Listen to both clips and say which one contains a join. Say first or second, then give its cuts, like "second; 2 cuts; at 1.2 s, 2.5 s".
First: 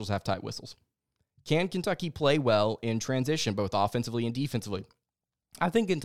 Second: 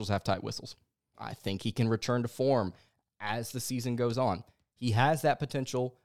second; 1 cut; at 1.1 s